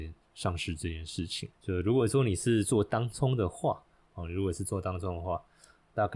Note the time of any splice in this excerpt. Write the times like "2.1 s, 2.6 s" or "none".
1.5 s